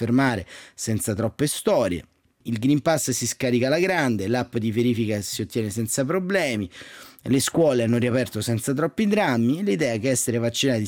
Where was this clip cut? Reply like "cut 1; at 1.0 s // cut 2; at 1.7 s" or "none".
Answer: cut 1; at 2.4 s